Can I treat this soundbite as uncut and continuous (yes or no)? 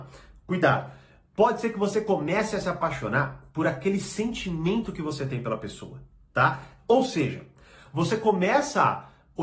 no